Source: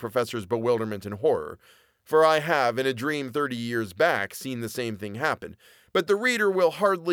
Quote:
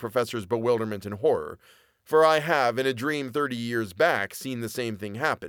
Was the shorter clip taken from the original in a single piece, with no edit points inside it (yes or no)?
yes